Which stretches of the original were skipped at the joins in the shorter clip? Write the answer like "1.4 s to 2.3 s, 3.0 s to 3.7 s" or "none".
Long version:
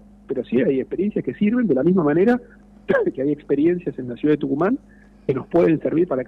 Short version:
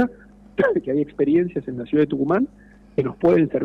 none